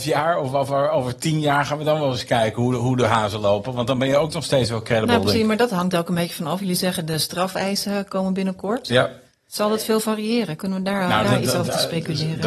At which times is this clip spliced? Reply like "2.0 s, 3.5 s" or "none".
9.5 s, 11.2 s